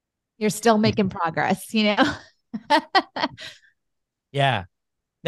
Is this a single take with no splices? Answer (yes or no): yes